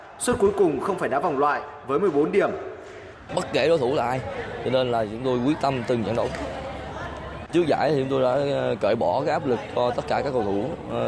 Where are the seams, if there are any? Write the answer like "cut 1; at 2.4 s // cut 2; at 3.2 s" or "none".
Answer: cut 1; at 3.3 s // cut 2; at 7.5 s